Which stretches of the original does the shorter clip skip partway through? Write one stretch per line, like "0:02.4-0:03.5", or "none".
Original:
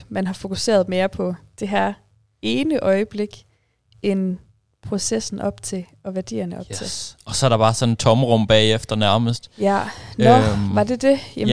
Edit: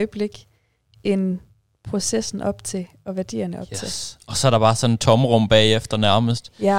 none